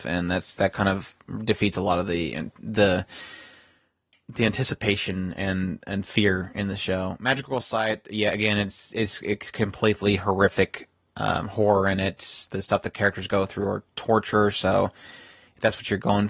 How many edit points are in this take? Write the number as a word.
zero